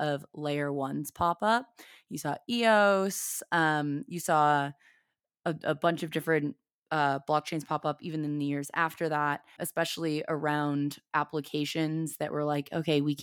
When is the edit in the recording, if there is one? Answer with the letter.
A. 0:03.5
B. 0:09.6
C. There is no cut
B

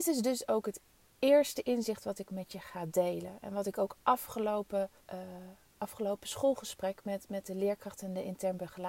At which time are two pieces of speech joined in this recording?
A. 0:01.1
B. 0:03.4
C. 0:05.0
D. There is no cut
C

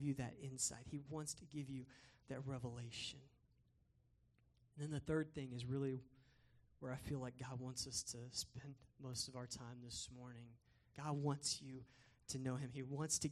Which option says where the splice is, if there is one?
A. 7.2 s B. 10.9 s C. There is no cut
B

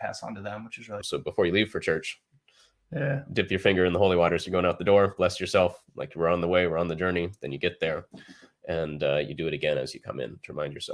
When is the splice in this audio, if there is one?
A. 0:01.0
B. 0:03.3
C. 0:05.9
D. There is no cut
A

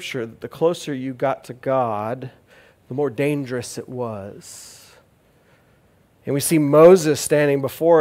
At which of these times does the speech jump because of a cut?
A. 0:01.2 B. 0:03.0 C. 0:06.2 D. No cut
C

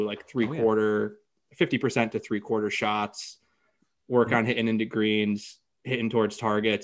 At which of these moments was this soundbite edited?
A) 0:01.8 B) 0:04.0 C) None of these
C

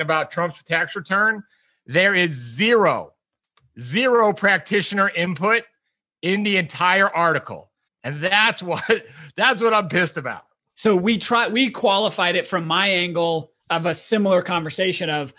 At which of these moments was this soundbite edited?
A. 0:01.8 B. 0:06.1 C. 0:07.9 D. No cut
C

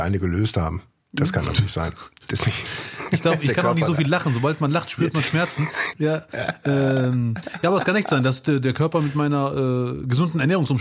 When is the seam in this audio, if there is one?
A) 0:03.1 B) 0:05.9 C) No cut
B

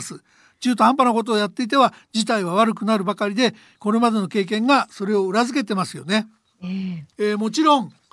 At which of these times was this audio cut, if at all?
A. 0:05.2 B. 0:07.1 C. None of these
B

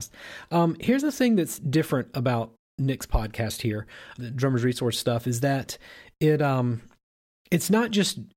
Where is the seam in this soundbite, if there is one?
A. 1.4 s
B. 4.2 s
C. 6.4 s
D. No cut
B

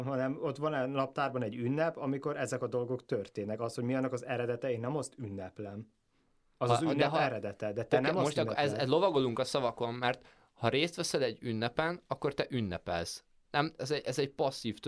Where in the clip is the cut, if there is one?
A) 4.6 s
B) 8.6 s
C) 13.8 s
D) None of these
C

